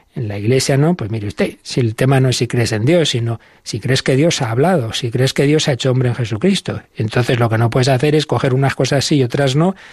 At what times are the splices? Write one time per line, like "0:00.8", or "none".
none